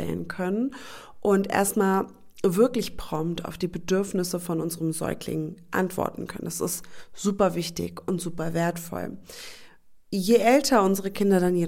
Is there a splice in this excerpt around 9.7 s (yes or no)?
no